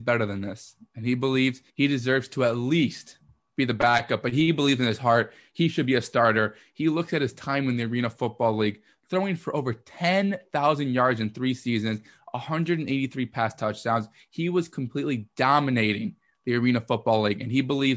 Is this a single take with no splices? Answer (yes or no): no